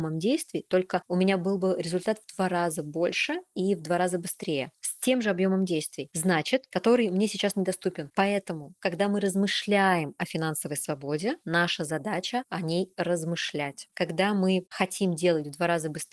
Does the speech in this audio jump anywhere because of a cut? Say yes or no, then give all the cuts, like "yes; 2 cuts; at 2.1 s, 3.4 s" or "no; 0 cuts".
yes; 3 cuts; at 6.7 s, 8.1 s, 13.9 s